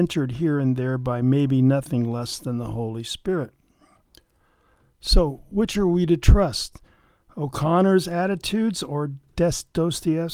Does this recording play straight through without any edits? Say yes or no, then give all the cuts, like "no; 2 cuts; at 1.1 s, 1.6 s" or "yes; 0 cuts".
yes; 0 cuts